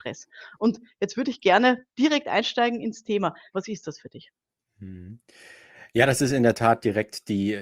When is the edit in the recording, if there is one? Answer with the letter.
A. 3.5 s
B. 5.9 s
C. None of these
A